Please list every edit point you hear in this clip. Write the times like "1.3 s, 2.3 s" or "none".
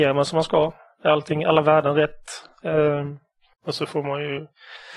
3.5 s